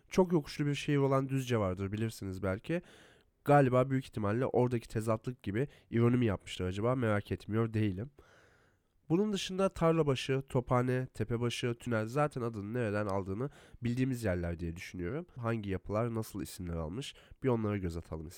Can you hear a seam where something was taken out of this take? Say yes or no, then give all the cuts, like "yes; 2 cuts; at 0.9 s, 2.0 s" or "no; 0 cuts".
yes; 1 cut; at 15.4 s